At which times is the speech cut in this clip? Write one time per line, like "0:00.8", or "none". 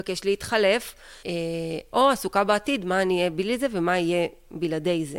0:01.2